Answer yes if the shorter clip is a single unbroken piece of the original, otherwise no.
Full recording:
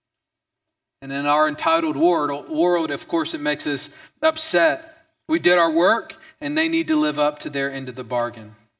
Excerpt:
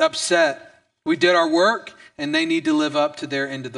yes